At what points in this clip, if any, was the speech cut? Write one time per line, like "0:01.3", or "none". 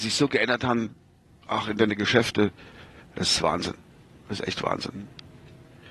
none